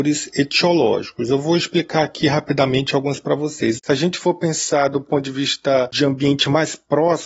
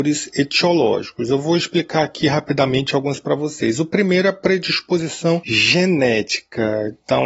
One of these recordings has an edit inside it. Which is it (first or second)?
first